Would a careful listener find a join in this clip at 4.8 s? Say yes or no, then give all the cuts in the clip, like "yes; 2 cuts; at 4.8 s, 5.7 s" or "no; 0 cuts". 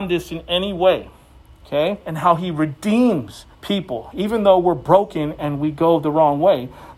no; 2 cuts; at 2.0 s, 3.5 s